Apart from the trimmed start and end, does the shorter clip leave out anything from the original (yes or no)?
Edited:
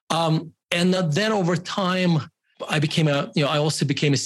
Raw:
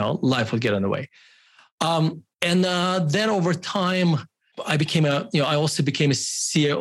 yes